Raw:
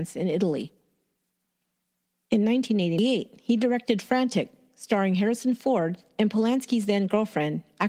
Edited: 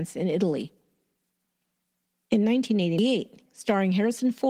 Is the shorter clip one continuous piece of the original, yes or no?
no